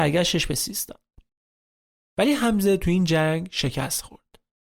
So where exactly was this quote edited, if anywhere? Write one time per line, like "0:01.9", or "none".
0:02.0